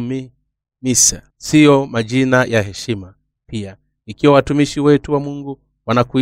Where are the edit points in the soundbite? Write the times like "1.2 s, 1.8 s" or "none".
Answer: 1.3 s